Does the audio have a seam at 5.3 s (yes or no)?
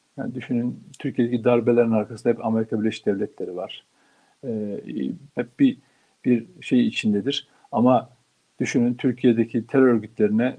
yes